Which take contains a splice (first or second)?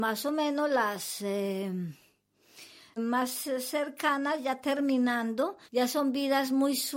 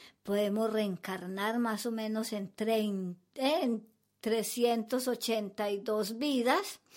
first